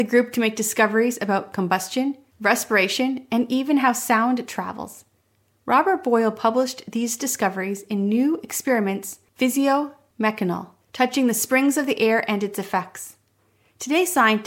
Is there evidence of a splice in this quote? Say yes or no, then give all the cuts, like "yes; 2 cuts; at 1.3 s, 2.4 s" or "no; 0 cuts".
no; 0 cuts